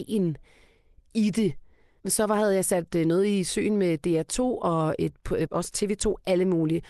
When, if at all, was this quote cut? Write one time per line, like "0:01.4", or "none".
0:02.0
0:05.5